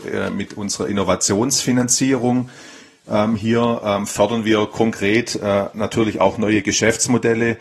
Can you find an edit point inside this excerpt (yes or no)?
no